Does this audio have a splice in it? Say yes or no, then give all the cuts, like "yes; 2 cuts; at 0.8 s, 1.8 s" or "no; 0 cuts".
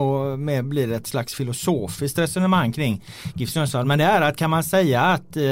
no; 0 cuts